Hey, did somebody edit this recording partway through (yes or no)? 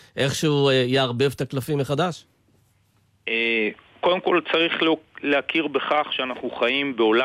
no